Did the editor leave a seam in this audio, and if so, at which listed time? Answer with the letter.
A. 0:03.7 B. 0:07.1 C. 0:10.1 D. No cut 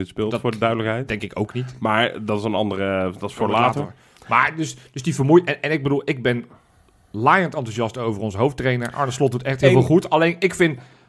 D